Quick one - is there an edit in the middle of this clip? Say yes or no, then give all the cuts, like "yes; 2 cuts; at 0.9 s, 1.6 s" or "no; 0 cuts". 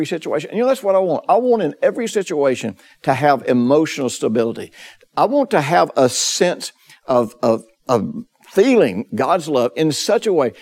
no; 0 cuts